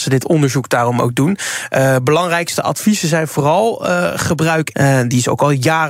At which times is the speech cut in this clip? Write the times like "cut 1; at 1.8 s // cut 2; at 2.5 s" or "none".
cut 1; at 4.7 s

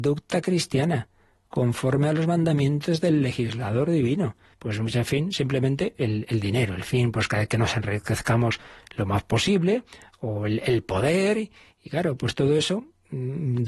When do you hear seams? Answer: cut 1; at 4.5 s

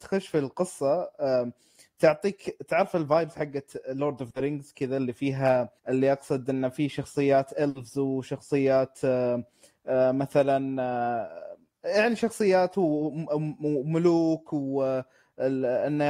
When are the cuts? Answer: cut 1; at 5.8 s

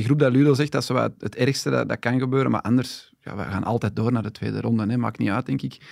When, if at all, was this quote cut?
none

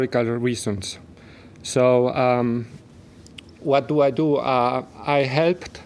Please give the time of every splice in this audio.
none

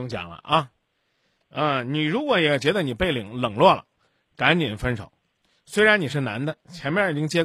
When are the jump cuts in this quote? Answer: none

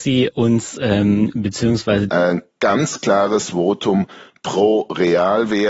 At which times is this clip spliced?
cut 1; at 2.1 s

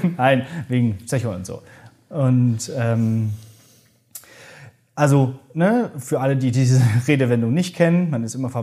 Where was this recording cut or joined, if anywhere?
none

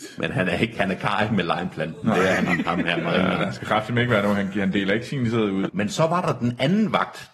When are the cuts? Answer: cut 1; at 2.5 s // cut 2; at 5.7 s

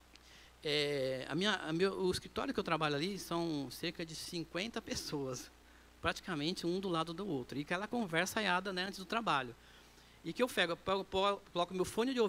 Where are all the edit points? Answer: none

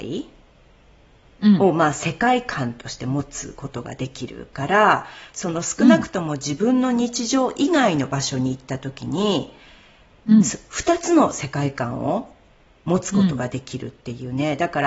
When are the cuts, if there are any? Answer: none

